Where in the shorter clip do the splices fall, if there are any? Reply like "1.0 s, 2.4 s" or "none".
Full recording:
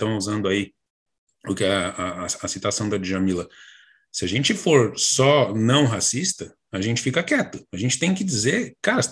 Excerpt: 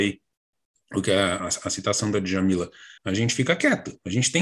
1.4 s, 3.0 s